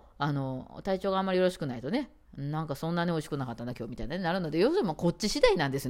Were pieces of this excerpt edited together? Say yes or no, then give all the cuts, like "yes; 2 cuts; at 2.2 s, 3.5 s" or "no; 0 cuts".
no; 0 cuts